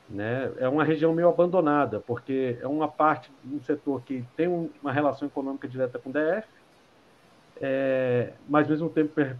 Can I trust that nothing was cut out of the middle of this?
yes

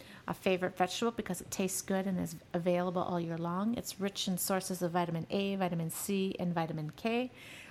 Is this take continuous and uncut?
yes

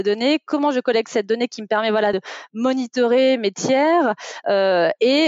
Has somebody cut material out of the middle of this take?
no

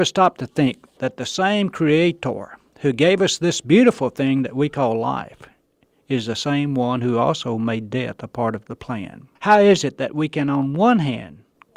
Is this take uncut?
no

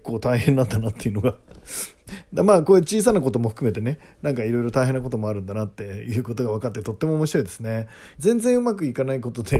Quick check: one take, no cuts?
no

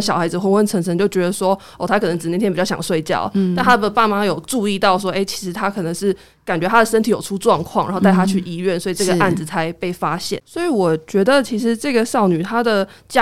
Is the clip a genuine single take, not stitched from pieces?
no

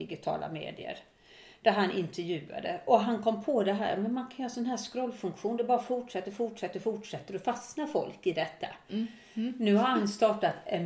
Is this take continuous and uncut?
yes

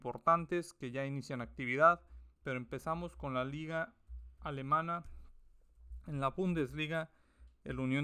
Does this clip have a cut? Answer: yes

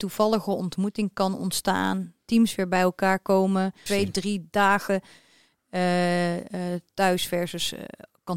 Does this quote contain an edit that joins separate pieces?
yes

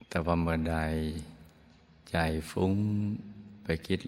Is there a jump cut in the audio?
no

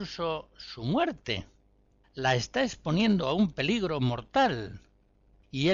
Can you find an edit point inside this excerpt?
yes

